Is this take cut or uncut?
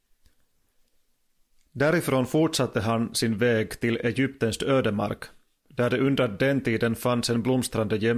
uncut